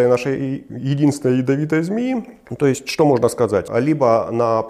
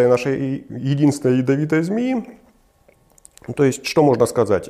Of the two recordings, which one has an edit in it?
first; 2 cuts; at 2.5 s, 3.7 s

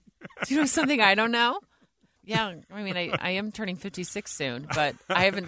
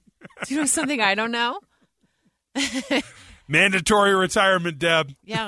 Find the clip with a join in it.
first; 1 cut; at 2.2 s

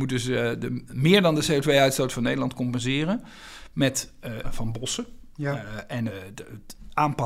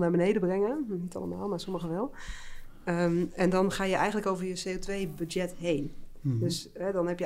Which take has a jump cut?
first; 2 cuts; at 4.4 s, 6.1 s

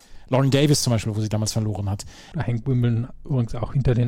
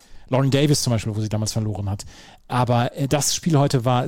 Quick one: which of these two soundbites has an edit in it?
first; 1 cut; at 2.3 s

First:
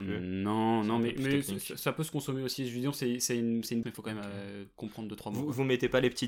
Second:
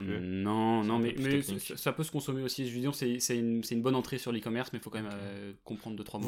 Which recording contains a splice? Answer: first; 1 cut; at 3.8 s

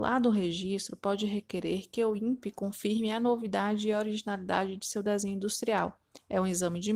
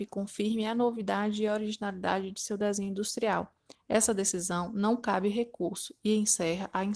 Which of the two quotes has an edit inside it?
second; 1 cut; at 3.7 s

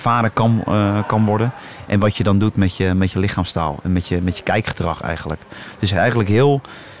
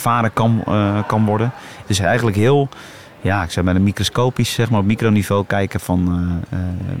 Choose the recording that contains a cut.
second; 1 cut; at 1.8 s

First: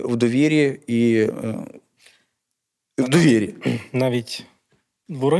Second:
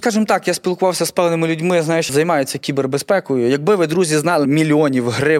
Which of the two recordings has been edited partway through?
second; 2 cuts; at 2.1 s, 4.5 s

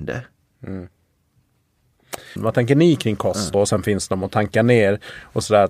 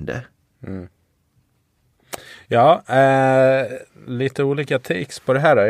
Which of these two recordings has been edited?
first; 2 cuts; at 2.4 s, 3.5 s

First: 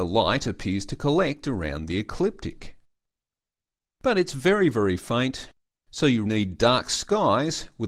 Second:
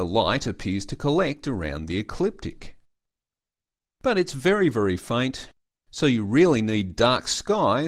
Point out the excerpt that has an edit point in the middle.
first; 1 cut; at 6.3 s

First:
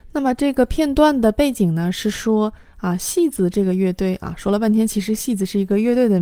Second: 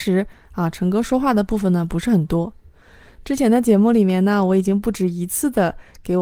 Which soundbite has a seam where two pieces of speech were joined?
second; 1 cut; at 3.2 s

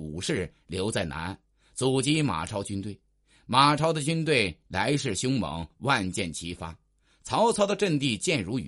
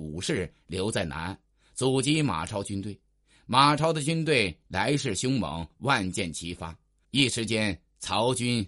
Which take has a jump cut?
second; 1 cut; at 7.0 s

